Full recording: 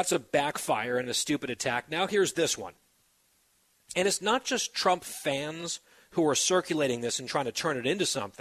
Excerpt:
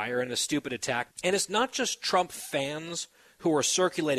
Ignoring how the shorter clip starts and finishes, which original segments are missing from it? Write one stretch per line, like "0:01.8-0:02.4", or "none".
0:01.9-0:03.8